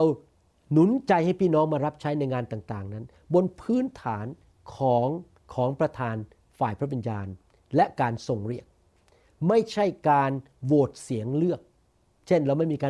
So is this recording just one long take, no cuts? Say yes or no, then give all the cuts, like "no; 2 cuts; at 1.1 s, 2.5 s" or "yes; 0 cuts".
yes; 0 cuts